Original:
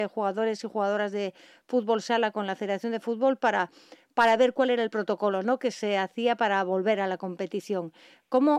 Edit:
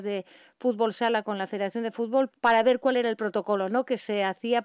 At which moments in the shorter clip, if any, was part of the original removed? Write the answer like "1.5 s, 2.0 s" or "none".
2.3 s